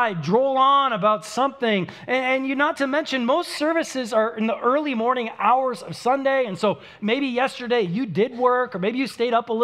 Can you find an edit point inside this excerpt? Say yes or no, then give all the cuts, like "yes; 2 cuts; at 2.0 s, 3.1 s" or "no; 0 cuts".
no; 0 cuts